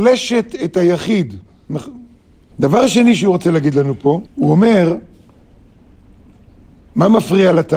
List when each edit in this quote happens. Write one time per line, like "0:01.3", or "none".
0:02.5
0:04.3